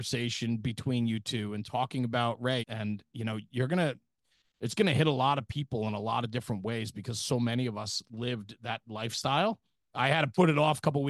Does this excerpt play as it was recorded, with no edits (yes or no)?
no